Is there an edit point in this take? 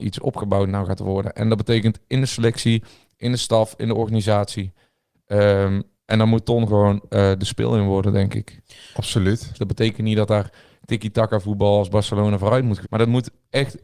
yes; 2 cuts; at 9.5 s, 12.8 s

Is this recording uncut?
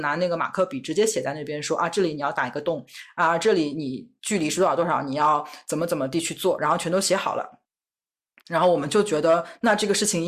yes; 0 cuts

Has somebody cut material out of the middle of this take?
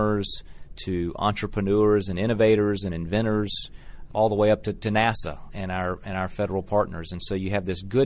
yes; 1 cut; at 4.1 s

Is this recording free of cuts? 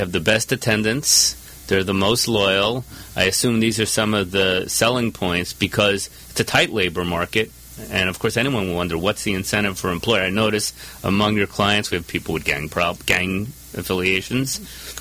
yes; 0 cuts

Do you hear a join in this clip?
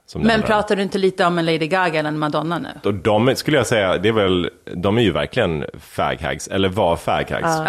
yes; 1 cut; at 2.8 s

